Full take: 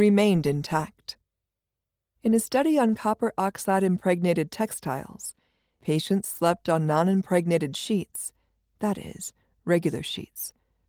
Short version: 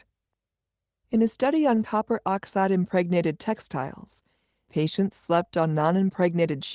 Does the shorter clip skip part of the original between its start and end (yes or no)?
no